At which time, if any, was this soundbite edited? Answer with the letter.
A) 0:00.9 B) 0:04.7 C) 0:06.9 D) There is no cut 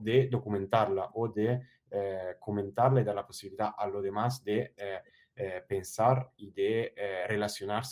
D